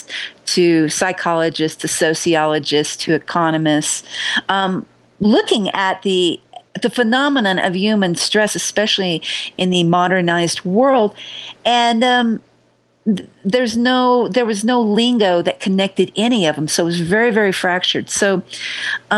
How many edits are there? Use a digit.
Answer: 1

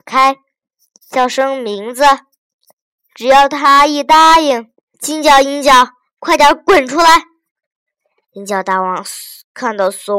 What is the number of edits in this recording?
1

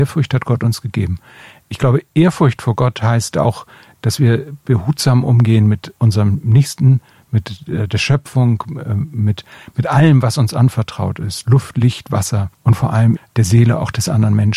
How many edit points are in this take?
2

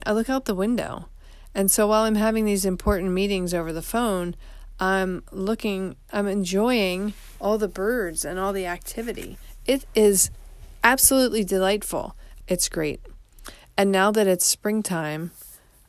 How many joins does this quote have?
1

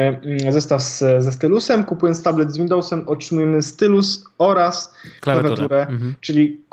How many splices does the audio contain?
0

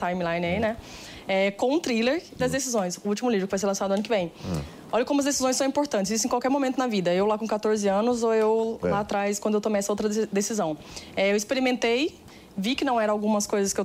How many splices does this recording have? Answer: 1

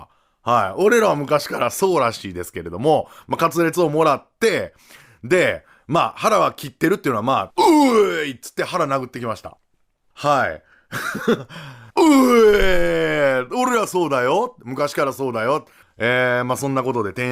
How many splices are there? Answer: 3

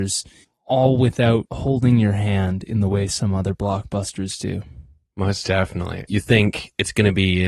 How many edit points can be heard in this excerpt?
1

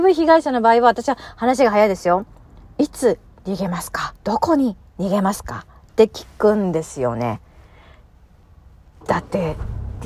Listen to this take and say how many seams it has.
1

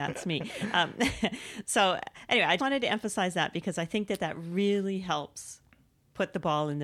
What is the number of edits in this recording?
1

